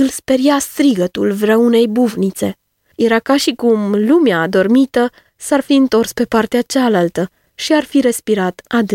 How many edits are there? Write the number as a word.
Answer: one